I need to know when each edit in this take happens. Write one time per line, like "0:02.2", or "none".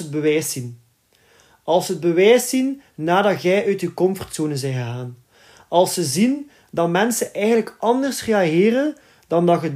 none